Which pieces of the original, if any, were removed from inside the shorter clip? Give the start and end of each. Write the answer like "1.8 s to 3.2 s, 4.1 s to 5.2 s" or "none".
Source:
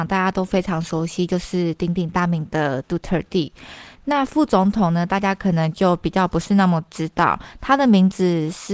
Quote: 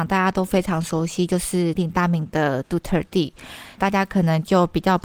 1.8 s to 1.9 s, 4.0 s to 5.1 s